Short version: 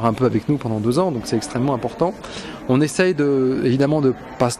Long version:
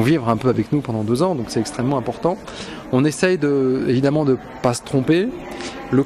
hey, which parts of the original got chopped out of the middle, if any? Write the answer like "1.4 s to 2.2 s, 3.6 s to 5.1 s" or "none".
none